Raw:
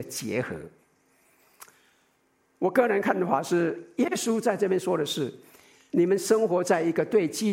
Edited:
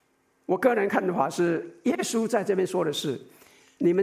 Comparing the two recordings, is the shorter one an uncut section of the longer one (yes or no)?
yes